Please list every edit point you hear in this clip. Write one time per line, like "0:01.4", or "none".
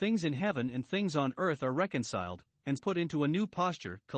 0:02.8